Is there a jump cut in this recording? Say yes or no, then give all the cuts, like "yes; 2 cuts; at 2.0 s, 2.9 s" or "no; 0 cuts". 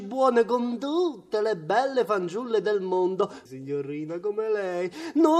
yes; 1 cut; at 3.5 s